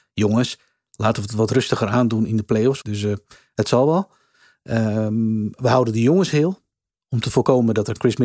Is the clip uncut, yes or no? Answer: no